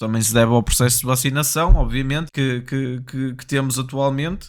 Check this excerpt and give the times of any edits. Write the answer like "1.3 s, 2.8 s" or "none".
2.3 s